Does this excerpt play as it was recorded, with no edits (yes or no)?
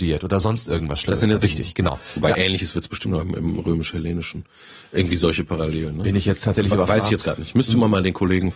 no